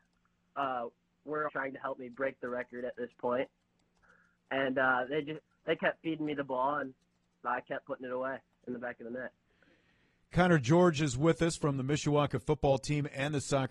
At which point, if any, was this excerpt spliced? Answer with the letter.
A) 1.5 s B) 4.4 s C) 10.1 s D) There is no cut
A